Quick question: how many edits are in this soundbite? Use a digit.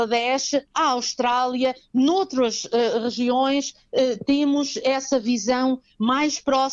0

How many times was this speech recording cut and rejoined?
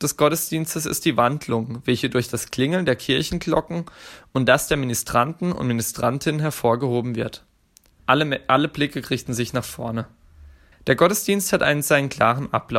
2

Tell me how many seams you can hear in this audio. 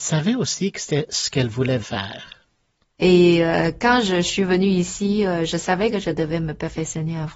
1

